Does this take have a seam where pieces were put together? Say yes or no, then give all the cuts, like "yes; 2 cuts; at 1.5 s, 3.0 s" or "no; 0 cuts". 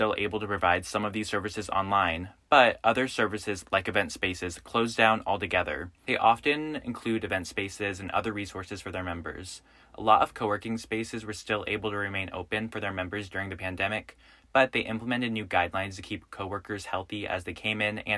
yes; 1 cut; at 6.0 s